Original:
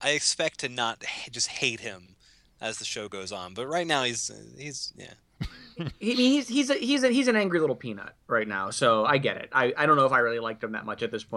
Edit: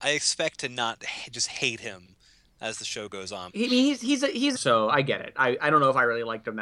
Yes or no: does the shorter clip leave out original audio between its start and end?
yes